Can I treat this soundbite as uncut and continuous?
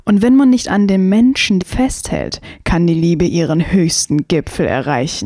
no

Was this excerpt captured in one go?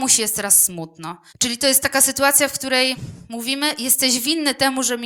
no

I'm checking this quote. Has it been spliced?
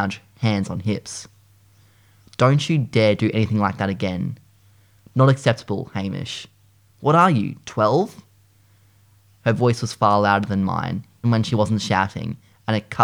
yes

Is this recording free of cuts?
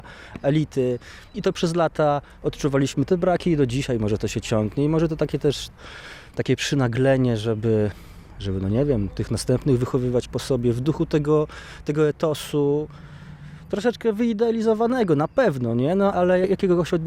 yes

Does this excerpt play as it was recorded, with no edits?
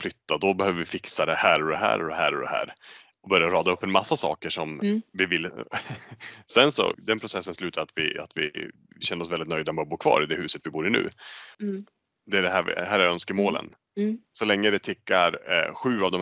no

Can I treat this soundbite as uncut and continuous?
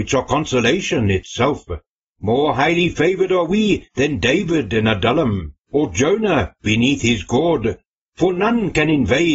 no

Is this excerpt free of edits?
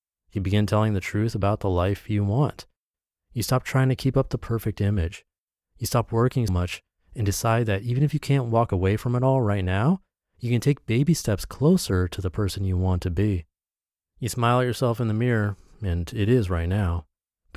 no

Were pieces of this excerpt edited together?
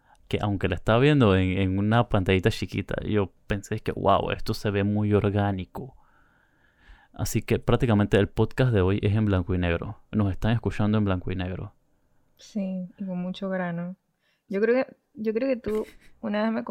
no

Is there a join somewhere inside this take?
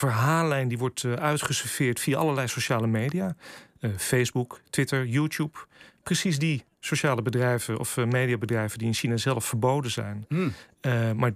no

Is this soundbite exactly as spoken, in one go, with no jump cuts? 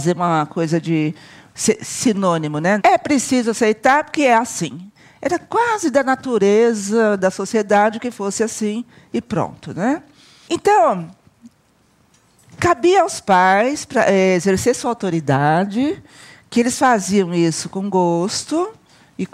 no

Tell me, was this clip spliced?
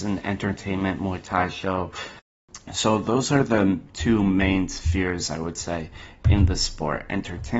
no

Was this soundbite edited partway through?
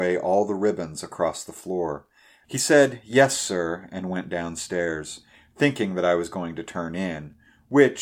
yes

